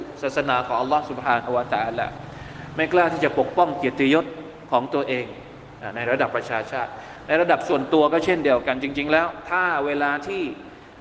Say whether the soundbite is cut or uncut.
uncut